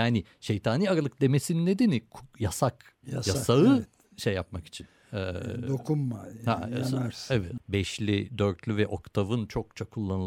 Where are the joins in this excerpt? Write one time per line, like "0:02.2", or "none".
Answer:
0:07.6